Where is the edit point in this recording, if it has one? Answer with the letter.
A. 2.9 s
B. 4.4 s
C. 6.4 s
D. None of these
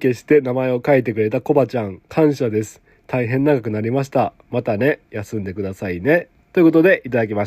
D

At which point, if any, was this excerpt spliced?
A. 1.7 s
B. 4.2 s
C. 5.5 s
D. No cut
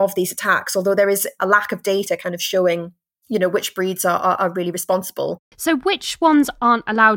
C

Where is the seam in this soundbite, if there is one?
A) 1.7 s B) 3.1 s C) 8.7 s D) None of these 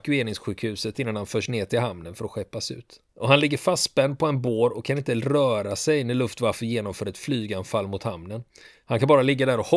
B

